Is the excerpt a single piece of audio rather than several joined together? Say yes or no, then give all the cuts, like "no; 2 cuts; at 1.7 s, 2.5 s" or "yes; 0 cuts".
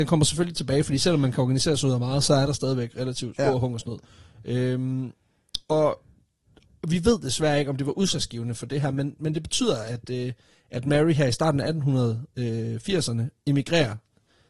yes; 0 cuts